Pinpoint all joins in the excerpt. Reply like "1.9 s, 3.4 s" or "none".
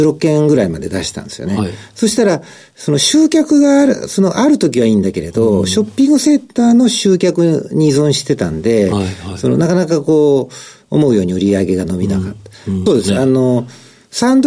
12.9 s